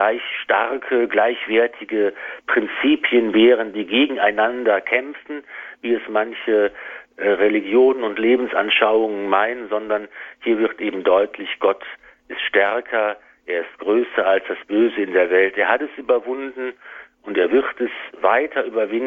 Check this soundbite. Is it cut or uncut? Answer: uncut